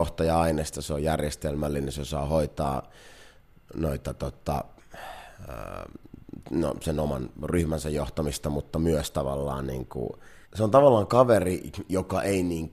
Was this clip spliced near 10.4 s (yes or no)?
yes